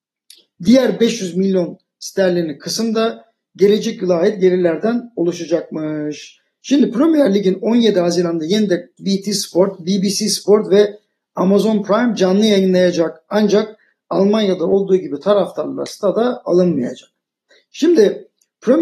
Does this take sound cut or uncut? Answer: cut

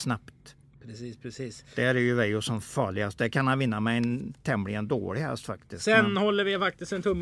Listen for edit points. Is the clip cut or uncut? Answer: uncut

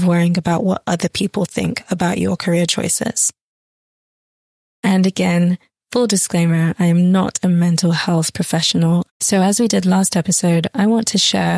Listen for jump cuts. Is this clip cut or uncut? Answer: cut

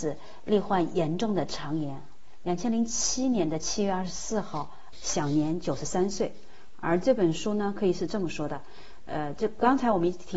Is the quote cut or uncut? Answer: cut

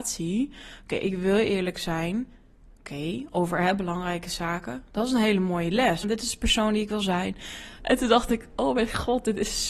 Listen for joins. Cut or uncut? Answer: cut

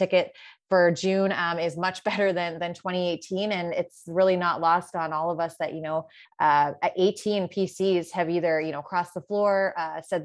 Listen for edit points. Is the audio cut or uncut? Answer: uncut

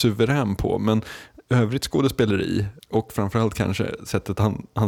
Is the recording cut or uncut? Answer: cut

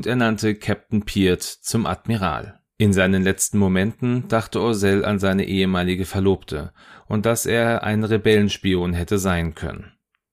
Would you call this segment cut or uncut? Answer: cut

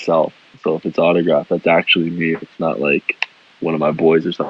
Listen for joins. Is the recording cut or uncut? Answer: uncut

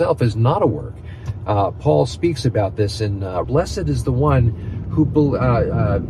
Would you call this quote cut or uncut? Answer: cut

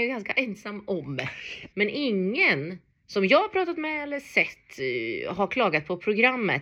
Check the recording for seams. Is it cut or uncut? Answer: cut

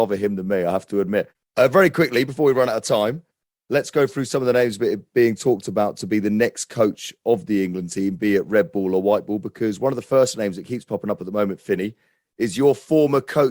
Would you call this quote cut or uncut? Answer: uncut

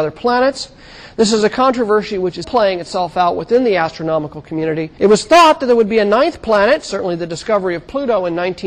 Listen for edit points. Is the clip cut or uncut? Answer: cut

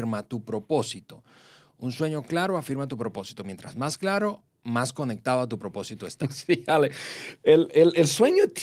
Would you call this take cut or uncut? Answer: uncut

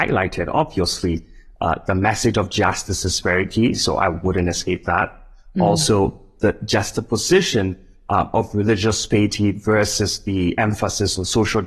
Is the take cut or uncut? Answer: uncut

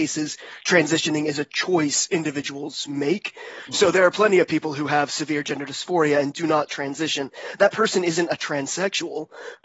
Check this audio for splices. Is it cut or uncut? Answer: uncut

